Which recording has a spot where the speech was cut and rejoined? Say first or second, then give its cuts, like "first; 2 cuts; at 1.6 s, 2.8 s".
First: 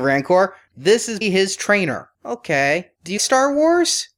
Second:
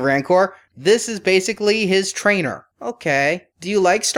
first; 2 cuts; at 1.2 s, 3.2 s